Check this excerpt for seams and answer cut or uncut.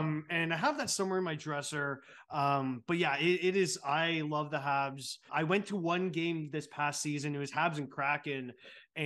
cut